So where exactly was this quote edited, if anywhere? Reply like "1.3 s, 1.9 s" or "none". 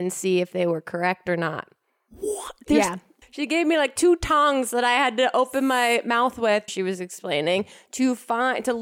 3.2 s, 6.7 s

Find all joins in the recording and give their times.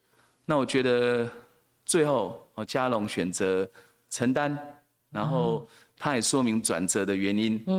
none

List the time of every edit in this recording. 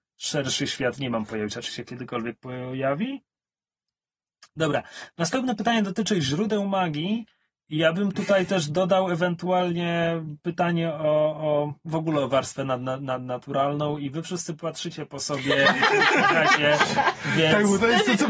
none

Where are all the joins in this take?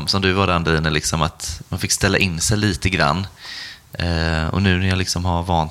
none

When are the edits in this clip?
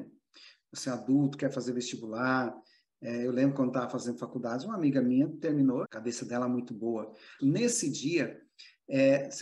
5.8 s, 7.4 s

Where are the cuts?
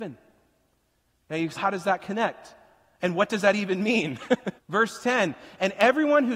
1.6 s, 4.6 s

